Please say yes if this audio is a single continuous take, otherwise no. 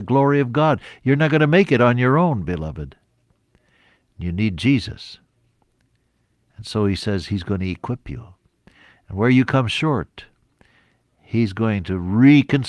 yes